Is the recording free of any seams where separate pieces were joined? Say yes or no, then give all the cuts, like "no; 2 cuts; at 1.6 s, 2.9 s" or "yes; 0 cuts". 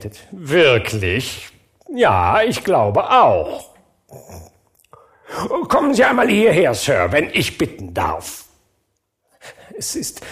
yes; 0 cuts